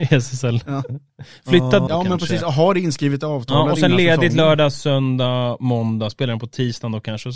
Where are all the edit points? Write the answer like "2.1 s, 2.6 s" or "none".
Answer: 1.9 s